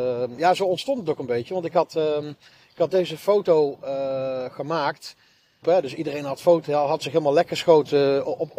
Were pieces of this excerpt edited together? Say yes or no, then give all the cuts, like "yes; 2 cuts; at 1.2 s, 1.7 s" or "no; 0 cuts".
yes; 1 cut; at 5.6 s